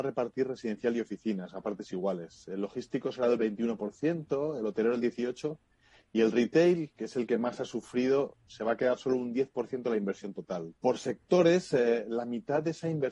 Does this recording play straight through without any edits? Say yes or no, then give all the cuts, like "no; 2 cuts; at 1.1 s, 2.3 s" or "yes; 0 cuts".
no; 1 cut; at 10.7 s